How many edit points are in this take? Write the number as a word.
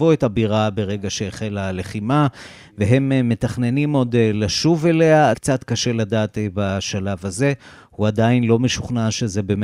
one